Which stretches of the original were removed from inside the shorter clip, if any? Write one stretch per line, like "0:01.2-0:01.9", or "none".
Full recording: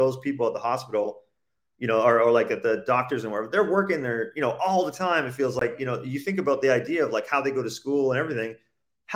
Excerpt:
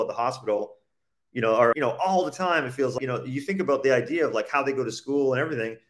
0:02.2-0:04.3
0:05.6-0:05.8